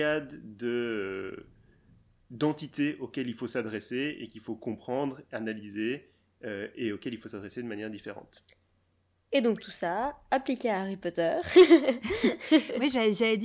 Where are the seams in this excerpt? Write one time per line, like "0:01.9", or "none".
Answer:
none